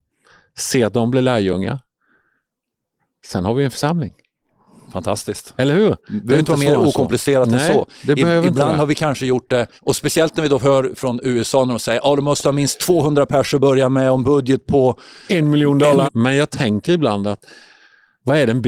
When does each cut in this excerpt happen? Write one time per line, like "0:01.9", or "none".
0:09.8
0:16.0